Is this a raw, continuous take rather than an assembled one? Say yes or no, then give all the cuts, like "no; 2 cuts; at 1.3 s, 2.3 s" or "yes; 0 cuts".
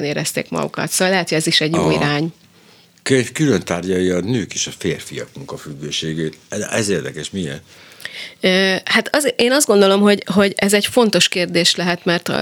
yes; 0 cuts